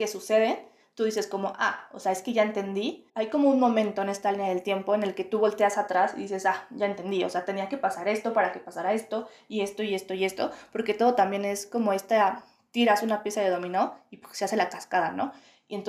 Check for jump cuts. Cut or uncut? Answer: cut